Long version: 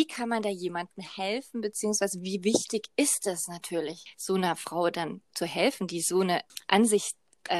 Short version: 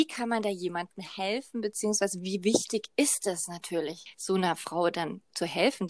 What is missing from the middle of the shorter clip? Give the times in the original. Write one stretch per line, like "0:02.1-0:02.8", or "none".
none